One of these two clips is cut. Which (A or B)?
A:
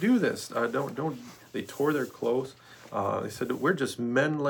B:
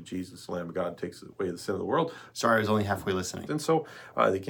B